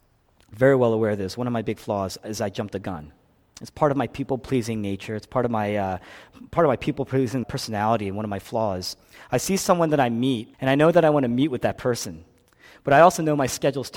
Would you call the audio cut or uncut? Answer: cut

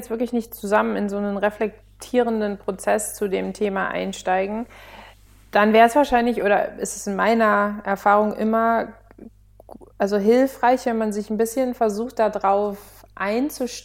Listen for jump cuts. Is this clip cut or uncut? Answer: uncut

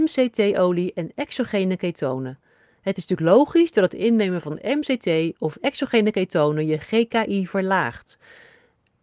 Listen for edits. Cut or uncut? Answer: uncut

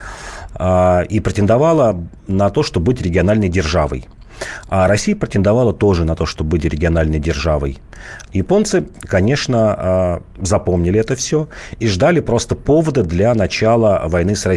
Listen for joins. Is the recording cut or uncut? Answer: cut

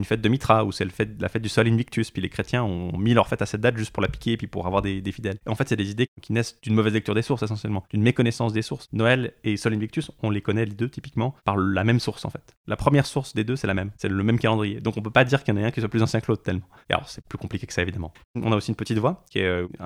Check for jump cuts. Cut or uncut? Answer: cut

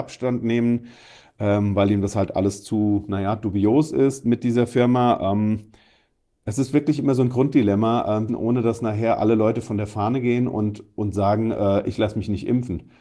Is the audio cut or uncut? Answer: cut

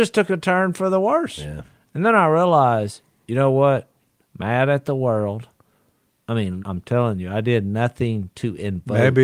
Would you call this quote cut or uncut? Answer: cut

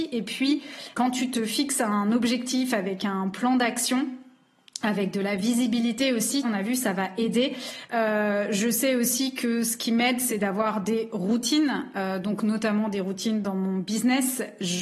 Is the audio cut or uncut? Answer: cut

